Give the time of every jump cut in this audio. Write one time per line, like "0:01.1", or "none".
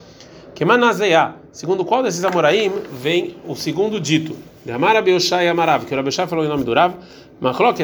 none